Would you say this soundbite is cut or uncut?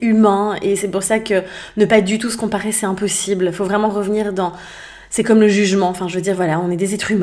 uncut